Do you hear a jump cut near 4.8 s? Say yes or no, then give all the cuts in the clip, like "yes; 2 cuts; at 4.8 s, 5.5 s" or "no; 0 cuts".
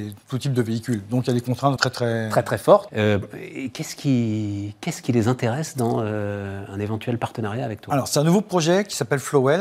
no; 2 cuts; at 1.8 s, 2.9 s